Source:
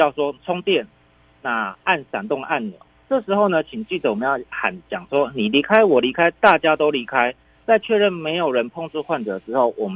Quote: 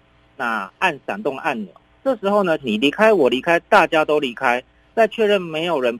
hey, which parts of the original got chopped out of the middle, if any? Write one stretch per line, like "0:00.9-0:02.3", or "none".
0:03.6-0:05.3

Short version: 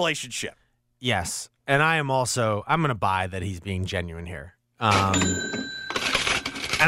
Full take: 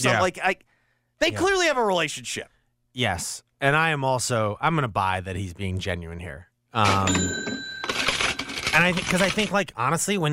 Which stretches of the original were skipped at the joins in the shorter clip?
none

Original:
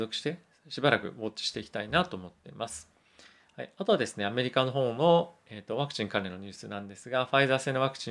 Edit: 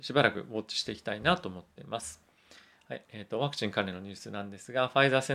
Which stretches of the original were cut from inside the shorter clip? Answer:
0:03.7-0:05.4

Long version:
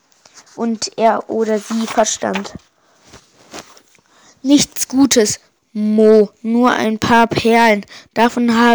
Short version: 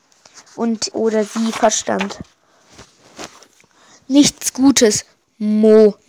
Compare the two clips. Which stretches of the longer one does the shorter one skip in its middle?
0:00.9-0:01.3

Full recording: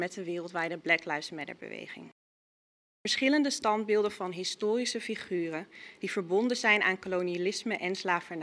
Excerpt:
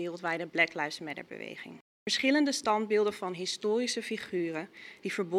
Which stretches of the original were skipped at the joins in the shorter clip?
0:02.2-0:02.9

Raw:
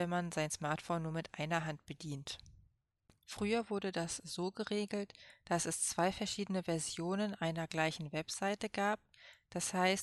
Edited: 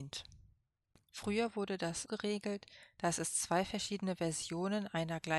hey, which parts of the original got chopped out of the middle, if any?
0:04.2-0:04.5

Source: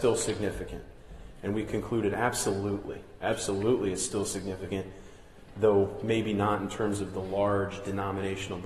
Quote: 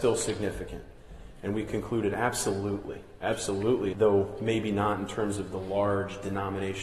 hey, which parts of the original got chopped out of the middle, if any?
0:03.9-0:05.5

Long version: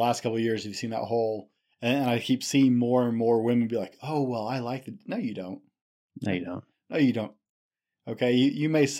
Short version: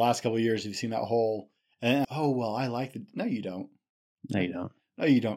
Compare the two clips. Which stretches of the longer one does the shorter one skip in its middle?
0:02.0-0:04.0

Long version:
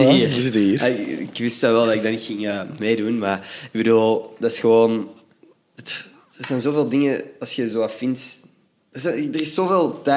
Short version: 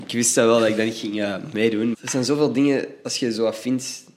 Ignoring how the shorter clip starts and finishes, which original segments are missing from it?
0:03.2-0:06.3

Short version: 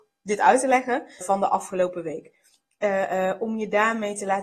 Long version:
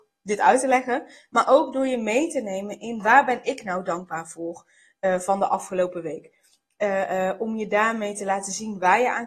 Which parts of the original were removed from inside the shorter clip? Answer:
0:01.2-0:05.2

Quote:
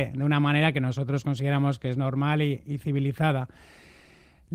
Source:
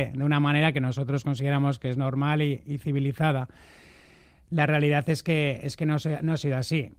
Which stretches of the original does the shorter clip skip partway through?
none

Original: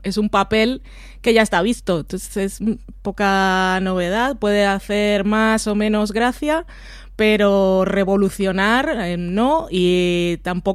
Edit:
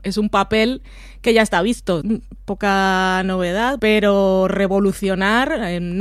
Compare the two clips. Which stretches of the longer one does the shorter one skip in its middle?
0:02.0-0:02.6
0:04.4-0:07.2

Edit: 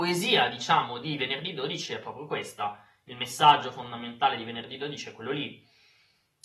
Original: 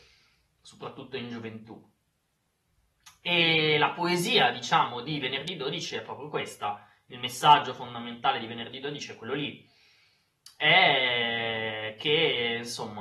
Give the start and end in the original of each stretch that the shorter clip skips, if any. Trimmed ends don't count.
none

